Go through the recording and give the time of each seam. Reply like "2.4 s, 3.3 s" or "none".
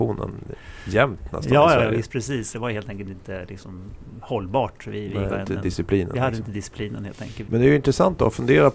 2.5 s, 5.3 s, 7.4 s

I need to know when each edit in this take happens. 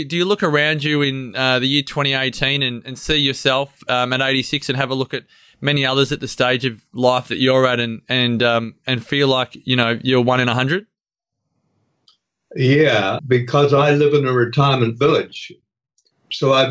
13.2 s

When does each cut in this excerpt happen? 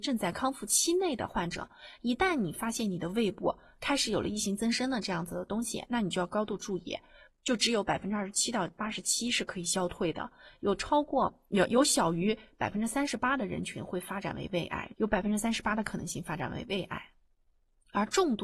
7.3 s, 14.9 s

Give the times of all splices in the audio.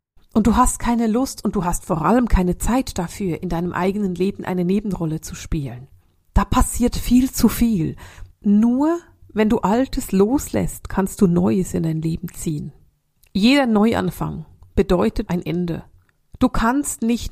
8.3 s, 15.3 s

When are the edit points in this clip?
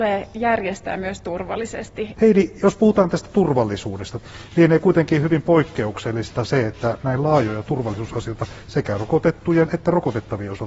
2.1 s

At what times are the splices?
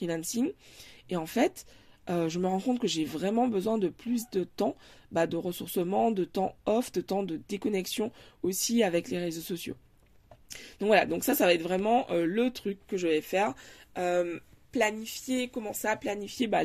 none

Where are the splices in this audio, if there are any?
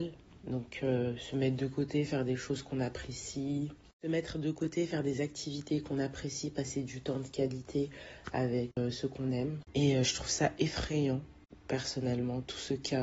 9.7 s

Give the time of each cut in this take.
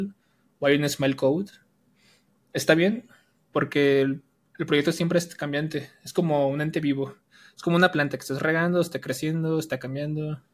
none

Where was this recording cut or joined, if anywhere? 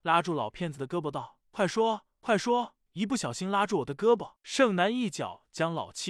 2.9 s, 4.4 s

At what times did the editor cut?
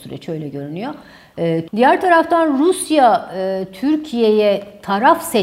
1.7 s

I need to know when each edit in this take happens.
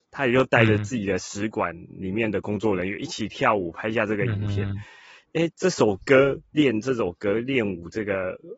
5.5 s

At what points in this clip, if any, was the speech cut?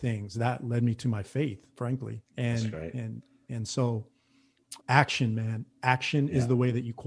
2.3 s, 4.8 s

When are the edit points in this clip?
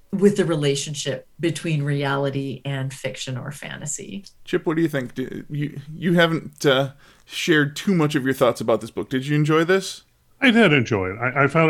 4.4 s

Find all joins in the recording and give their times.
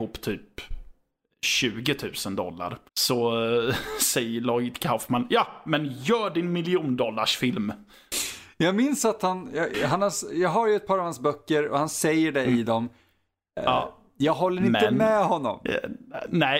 2.9 s

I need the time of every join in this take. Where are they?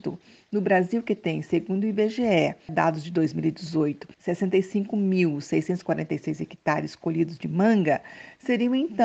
2.7 s, 4.1 s

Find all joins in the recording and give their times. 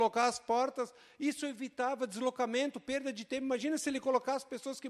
none

